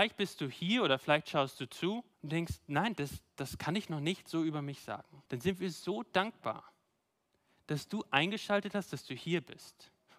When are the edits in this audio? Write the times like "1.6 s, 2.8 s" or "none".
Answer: 2.1 s, 5.3 s